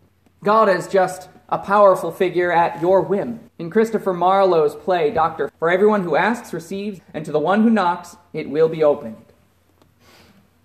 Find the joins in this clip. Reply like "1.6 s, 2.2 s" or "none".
3.5 s, 5.5 s, 7.0 s